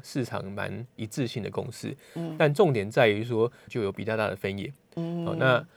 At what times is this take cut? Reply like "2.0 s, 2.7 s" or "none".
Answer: 3.7 s